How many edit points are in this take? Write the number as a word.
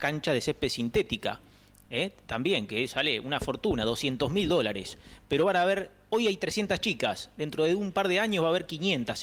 zero